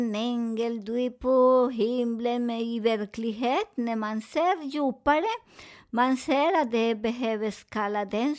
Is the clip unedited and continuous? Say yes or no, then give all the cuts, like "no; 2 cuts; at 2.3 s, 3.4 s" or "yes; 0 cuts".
yes; 0 cuts